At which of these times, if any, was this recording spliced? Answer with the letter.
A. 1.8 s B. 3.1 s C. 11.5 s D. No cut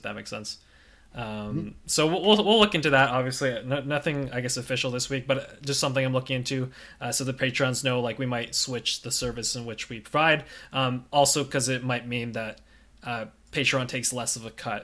D